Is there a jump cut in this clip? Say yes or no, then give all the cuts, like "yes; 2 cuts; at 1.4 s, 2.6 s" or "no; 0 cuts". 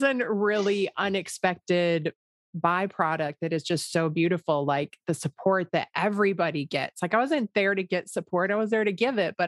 no; 0 cuts